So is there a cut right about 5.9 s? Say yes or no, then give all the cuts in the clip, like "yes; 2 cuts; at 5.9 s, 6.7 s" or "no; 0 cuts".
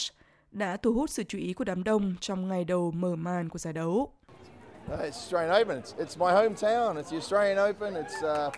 yes; 1 cut; at 5.9 s